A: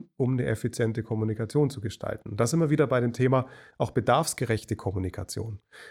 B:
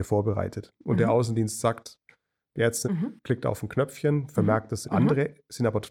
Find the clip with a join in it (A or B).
B